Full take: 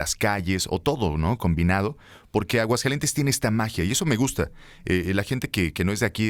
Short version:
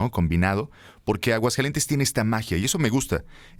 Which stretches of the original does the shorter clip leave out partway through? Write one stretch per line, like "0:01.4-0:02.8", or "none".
none